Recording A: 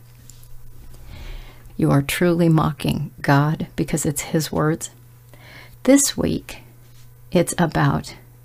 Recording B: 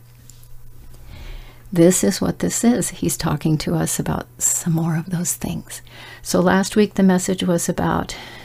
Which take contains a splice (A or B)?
A